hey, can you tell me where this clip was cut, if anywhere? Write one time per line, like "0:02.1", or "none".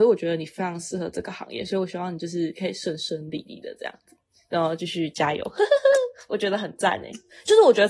none